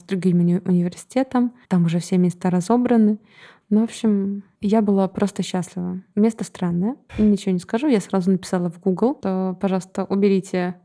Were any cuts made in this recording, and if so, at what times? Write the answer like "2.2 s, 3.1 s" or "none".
1.6 s

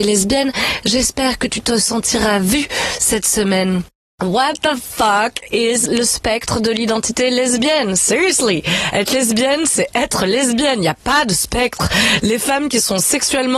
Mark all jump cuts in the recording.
none

